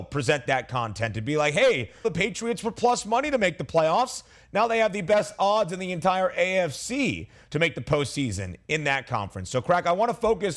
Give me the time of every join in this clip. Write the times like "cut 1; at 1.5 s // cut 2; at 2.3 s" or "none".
cut 1; at 2.0 s

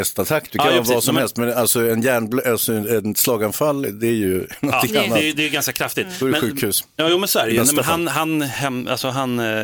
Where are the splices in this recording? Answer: none

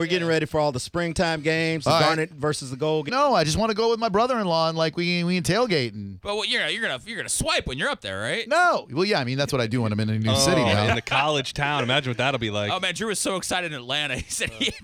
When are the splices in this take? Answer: cut 1; at 3.1 s

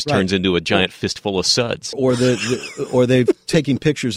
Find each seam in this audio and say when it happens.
cut 1; at 1.9 s

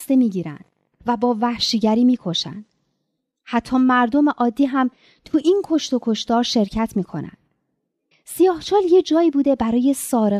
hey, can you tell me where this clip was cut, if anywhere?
cut 1; at 8.1 s

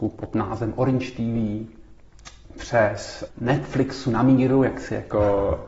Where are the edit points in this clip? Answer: cut 1; at 3.3 s

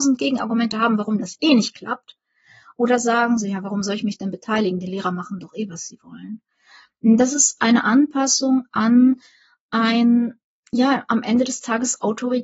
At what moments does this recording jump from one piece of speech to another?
none

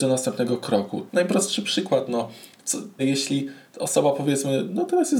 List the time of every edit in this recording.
cut 1; at 1.1 s // cut 2; at 3.0 s

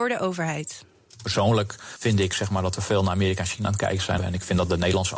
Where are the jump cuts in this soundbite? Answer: cut 1; at 4.2 s

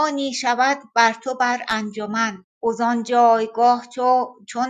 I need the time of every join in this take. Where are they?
cut 1; at 2.5 s

